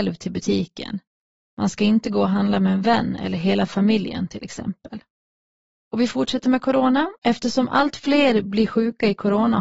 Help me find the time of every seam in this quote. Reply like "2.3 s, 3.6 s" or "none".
5.8 s, 7.2 s